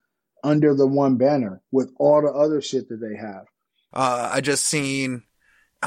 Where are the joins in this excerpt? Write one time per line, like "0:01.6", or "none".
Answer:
0:01.6
0:03.9